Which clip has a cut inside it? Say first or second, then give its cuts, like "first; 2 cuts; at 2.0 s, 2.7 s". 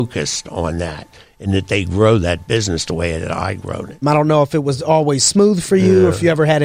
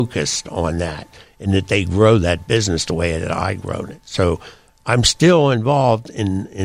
first; 1 cut; at 4.0 s